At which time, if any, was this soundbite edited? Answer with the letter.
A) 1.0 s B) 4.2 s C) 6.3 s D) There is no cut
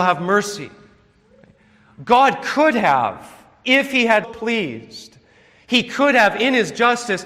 B